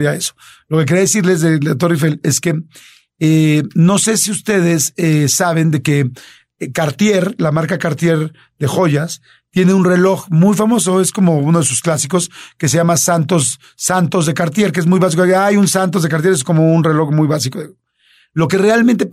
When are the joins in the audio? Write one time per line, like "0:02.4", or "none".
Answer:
none